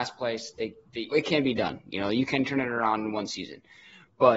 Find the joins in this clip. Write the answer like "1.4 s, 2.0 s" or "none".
1.1 s